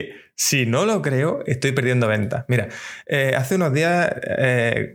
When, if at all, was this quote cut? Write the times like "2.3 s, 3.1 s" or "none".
none

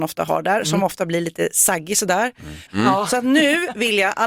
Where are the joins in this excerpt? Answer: 2.7 s

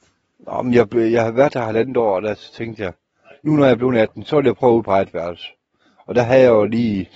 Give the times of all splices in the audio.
none

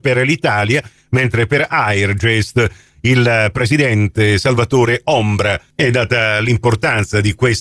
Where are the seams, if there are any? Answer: none

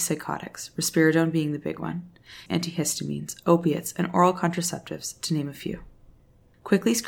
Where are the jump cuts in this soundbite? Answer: 2.5 s

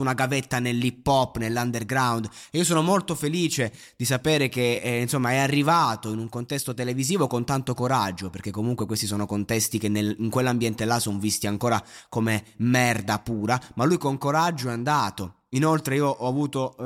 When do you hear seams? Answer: none

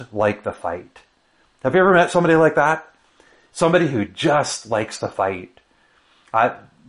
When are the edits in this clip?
none

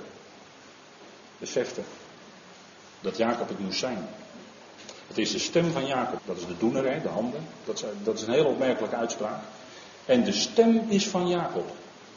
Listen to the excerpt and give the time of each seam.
6.2 s

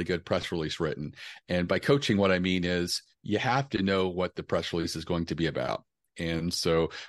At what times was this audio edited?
none

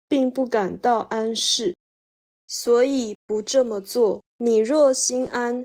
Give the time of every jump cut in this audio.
4.3 s

